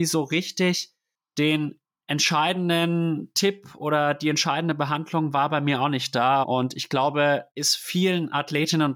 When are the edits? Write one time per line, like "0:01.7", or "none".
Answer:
0:06.4
0:07.5